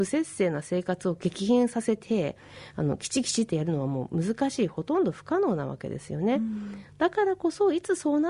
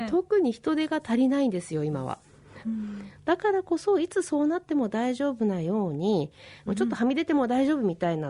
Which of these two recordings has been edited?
second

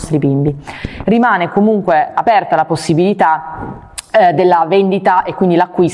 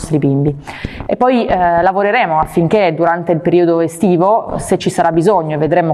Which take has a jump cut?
first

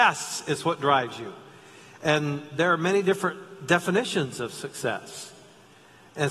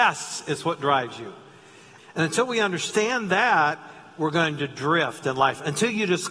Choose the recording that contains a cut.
second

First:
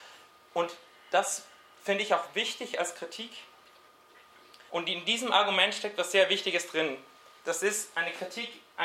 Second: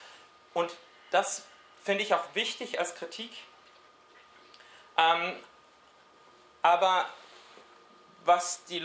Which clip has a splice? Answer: first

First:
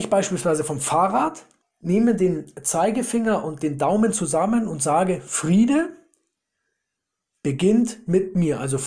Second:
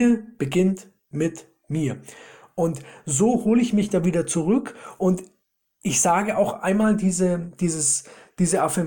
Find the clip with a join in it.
first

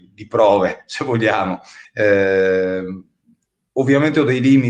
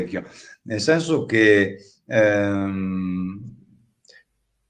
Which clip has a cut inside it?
first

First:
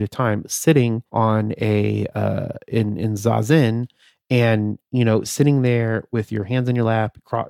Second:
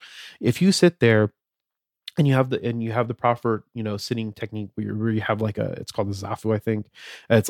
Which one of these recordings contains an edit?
first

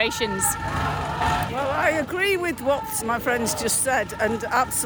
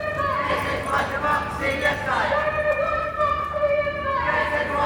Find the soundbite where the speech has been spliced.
first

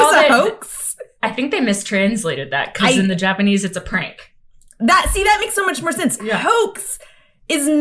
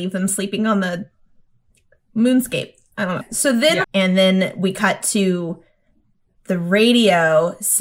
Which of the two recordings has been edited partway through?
second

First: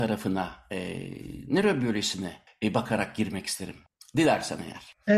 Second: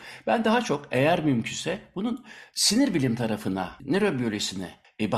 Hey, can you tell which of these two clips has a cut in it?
second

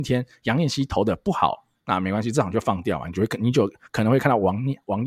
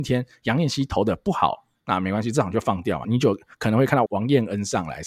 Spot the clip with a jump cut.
second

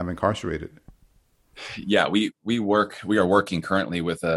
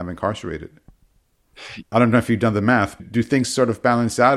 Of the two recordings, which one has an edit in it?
second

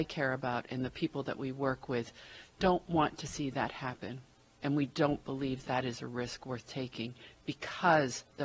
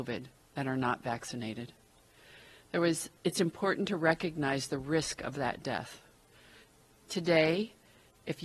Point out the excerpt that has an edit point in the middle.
first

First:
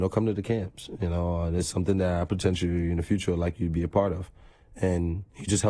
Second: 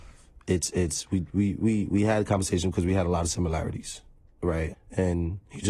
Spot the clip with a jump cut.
second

